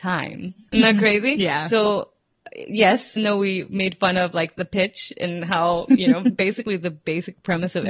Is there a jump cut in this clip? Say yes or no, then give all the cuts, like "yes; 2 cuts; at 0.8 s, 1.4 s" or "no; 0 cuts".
yes; 1 cut; at 3.2 s